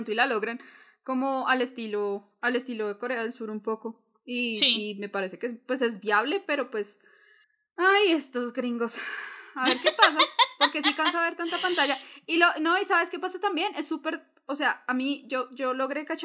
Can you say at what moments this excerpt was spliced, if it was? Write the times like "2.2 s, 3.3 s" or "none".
none